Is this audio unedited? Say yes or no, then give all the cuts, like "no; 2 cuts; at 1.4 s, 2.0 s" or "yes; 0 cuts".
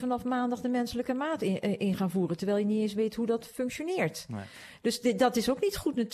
yes; 0 cuts